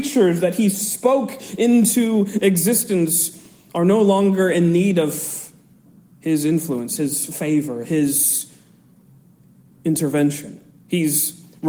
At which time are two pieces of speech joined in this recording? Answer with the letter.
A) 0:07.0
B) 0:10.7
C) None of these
C